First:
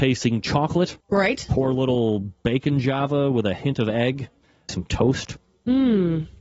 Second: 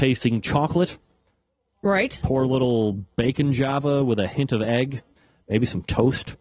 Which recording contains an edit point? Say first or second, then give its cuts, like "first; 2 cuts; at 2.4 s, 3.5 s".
first; 2 cuts; at 1.0 s, 4.7 s